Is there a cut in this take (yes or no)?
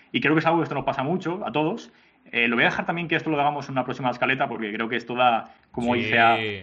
no